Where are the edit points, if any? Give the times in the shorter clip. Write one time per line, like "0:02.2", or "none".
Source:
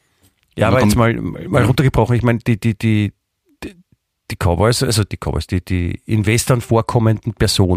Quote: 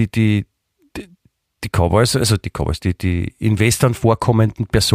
none